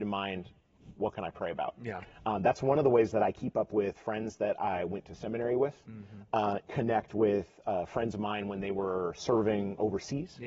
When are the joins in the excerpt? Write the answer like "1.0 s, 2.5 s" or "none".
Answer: 6.6 s